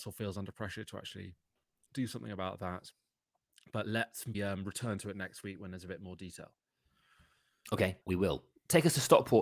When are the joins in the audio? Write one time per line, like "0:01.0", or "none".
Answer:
0:04.3
0:08.0

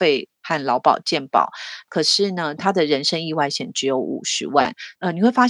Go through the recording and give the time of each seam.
0:02.6

